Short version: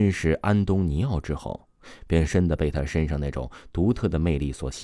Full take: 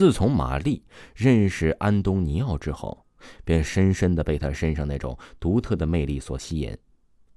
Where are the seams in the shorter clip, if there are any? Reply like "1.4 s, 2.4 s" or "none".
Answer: 2.3 s